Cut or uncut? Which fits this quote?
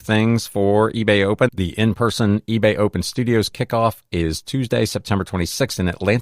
cut